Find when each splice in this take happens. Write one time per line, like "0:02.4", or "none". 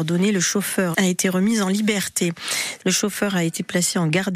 0:00.9
0:02.8